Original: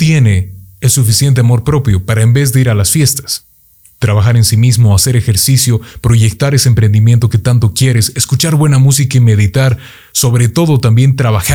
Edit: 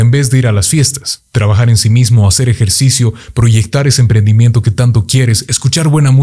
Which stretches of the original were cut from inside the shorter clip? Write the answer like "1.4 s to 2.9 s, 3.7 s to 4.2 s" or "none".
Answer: 3.5 s to 3.9 s